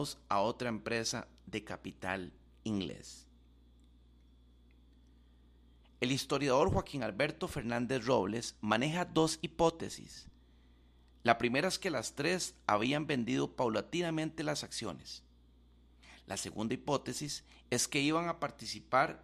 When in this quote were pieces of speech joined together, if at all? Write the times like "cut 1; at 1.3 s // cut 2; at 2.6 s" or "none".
cut 1; at 5.8 s